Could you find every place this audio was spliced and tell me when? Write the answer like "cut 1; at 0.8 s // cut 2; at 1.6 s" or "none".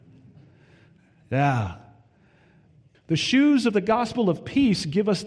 cut 1; at 2.9 s